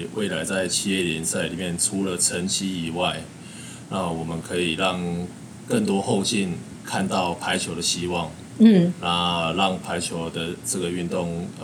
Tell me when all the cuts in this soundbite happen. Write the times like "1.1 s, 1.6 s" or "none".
none